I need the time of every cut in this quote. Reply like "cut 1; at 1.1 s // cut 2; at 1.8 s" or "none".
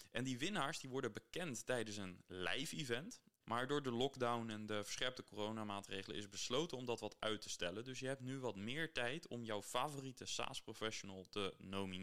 cut 1; at 3.4 s